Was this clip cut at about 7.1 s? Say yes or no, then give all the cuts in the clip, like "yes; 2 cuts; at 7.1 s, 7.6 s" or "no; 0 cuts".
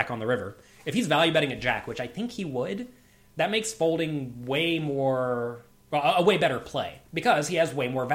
yes; 1 cut; at 7.1 s